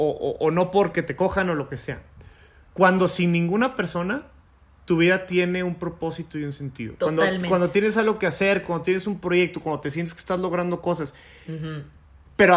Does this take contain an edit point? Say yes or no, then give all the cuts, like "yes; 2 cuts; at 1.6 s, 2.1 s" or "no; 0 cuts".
no; 0 cuts